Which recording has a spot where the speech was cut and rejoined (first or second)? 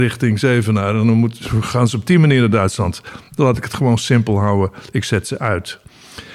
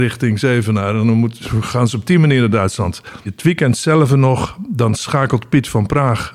second